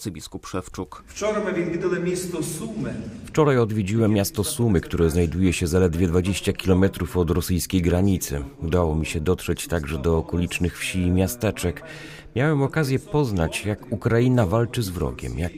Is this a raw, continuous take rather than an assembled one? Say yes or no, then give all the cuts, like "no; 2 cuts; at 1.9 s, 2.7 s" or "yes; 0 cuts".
yes; 0 cuts